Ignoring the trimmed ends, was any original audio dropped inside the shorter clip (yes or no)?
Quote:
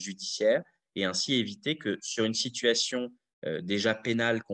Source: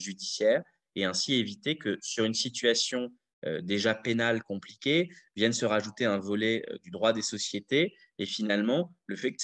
no